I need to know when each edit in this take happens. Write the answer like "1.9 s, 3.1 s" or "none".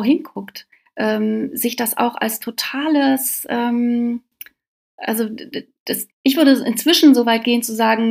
6.1 s